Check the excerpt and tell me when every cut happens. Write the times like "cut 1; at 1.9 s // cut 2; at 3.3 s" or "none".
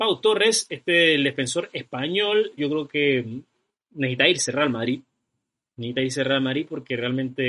cut 1; at 2.6 s